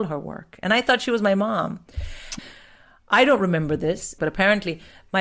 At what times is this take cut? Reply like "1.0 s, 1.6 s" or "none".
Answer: 2.4 s, 4.2 s